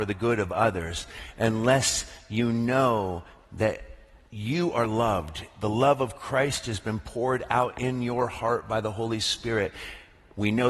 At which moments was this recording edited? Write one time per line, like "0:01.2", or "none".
none